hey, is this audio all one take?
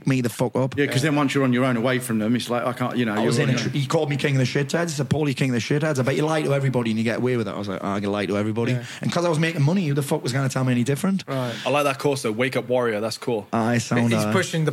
yes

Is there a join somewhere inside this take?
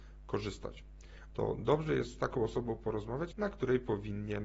yes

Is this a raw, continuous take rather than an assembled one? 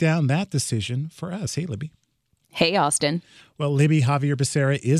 yes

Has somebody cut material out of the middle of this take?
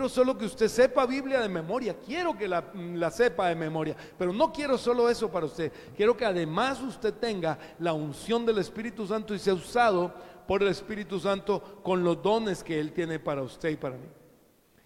no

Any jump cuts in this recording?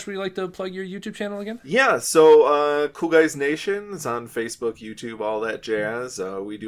no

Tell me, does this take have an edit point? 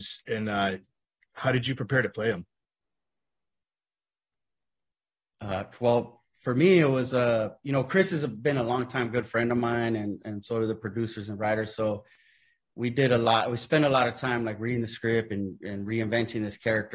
no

